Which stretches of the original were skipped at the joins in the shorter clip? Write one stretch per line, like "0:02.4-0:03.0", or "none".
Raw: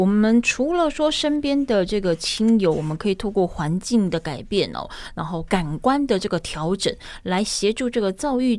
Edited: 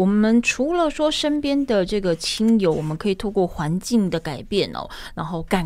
none